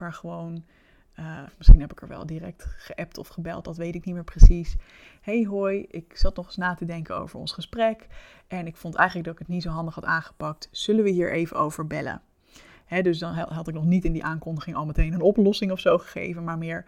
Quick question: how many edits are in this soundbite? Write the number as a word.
one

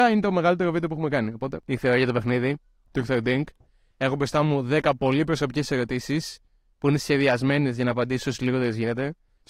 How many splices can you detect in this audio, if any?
zero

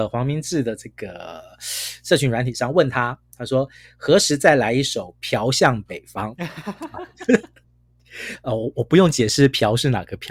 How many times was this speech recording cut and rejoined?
zero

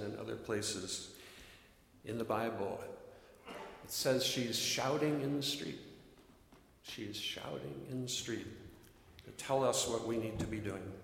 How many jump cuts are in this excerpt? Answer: zero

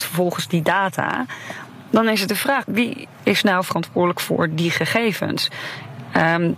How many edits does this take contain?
one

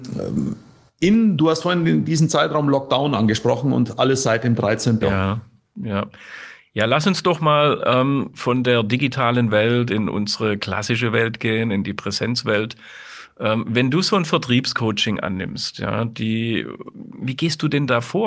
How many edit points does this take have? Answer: one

